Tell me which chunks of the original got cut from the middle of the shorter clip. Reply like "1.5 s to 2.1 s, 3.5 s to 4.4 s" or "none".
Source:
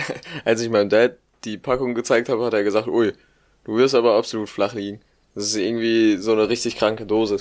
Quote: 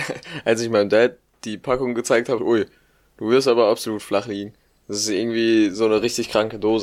2.4 s to 2.8 s